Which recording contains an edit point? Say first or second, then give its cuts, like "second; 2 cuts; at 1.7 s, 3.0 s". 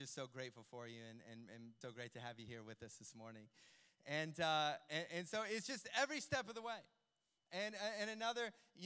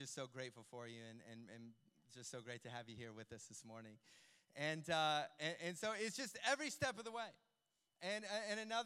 first; 1 cut; at 1.8 s